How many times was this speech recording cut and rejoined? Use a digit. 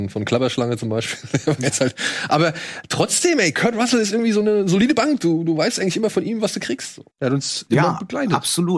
1